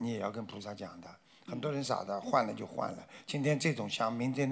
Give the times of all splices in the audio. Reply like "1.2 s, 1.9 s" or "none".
1.8 s